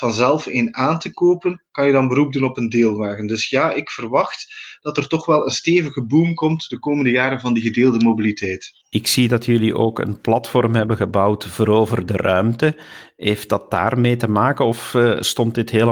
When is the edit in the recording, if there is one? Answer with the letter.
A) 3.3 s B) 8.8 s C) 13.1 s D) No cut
B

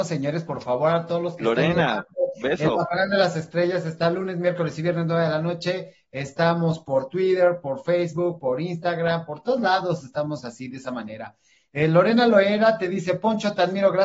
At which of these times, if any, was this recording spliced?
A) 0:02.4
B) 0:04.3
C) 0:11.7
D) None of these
D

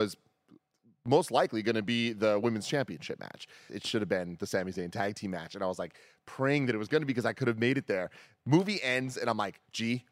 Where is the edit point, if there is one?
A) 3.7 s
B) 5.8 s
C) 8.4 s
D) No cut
A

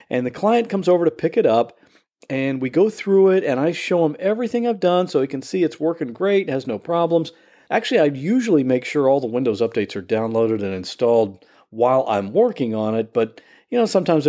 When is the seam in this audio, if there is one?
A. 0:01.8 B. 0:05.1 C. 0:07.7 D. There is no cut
C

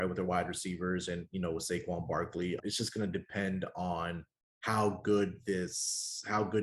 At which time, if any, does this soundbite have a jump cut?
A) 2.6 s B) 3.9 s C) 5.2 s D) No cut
A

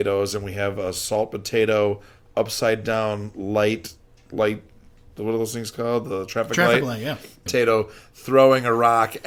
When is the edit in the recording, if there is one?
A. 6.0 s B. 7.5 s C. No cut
B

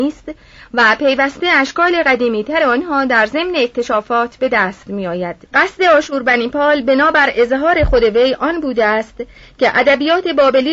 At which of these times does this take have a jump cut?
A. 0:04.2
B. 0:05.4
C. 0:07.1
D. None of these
B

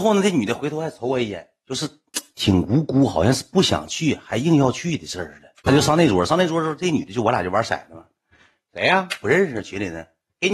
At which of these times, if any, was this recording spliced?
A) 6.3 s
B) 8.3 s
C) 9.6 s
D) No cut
D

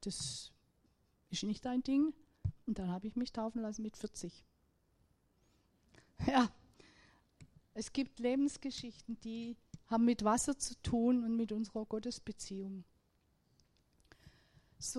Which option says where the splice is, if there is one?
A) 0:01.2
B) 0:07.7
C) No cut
B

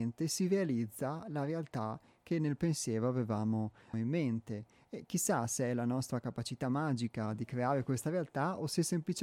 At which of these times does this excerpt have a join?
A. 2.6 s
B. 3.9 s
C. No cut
B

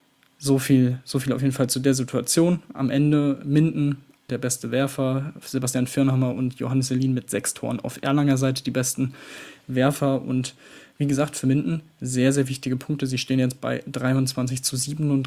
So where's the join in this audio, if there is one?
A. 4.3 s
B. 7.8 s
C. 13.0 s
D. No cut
A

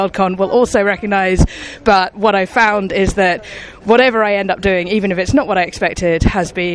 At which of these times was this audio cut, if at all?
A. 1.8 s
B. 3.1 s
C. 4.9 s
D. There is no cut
D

